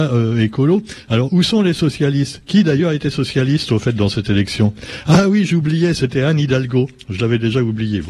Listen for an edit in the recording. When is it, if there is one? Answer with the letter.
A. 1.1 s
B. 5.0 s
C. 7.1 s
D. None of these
D